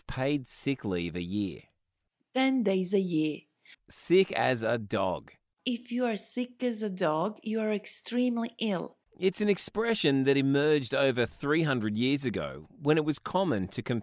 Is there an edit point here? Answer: yes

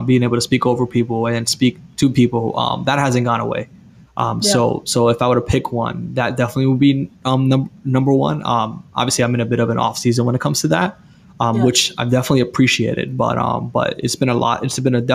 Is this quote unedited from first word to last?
yes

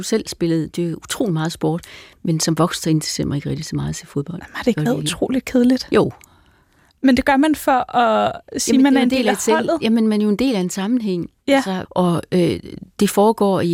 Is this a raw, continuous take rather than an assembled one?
no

